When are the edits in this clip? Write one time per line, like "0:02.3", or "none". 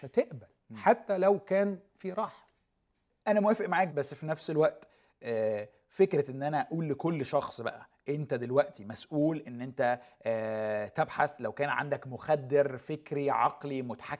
0:03.9

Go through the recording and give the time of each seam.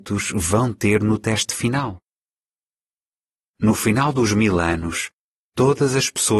0:03.5

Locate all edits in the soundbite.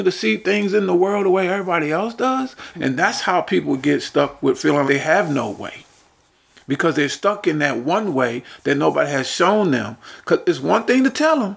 0:02.7
0:04.9

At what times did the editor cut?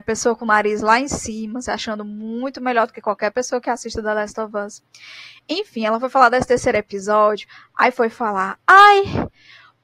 none

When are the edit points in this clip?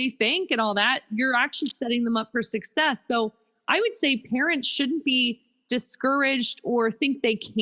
none

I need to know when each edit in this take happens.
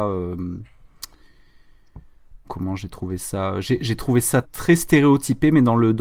0:02.4
0:04.4

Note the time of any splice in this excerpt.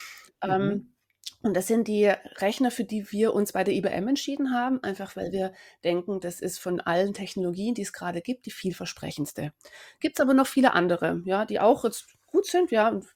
none

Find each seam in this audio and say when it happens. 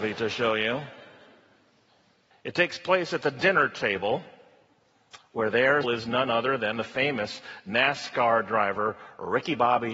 0:02.3
0:05.8

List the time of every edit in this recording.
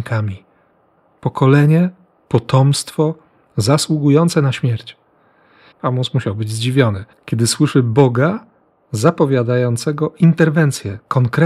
0:05.7
0:07.1

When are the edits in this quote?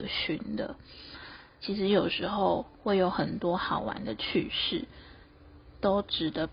0:01.6
0:02.7

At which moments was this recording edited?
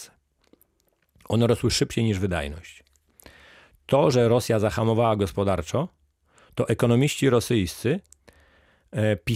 none

